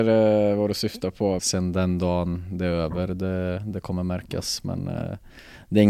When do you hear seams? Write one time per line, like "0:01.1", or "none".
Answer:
0:01.4